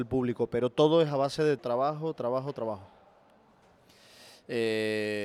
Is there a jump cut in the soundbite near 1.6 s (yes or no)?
yes